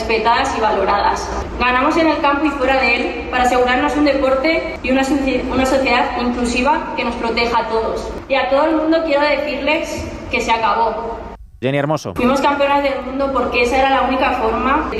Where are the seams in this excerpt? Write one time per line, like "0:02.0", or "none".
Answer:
0:01.5
0:11.6